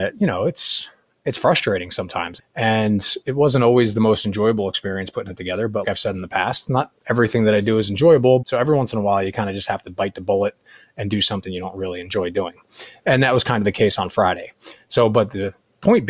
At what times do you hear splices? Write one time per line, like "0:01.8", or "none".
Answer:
0:02.4
0:05.8
0:08.4

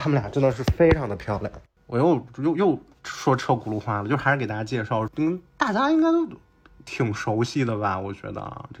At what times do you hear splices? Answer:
0:01.8
0:05.1

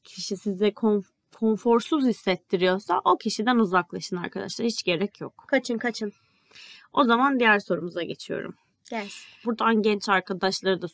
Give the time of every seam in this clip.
0:09.4

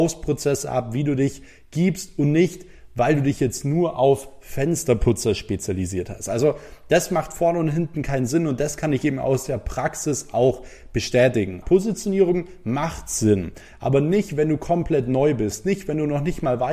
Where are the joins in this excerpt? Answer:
0:11.6

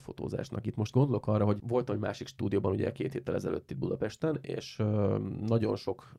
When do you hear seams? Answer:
none

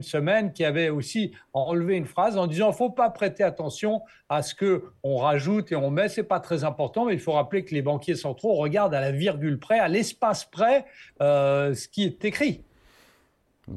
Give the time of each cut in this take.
0:11.1

